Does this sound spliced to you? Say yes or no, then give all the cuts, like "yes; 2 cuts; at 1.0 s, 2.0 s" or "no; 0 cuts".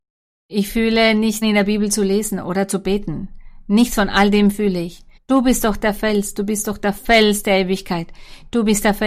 yes; 2 cuts; at 1.4 s, 5.2 s